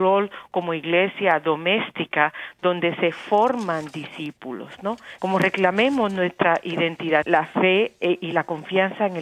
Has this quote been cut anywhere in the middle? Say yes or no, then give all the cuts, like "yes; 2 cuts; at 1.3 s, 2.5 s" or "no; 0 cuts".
yes; 2 cuts; at 5.2 s, 7.2 s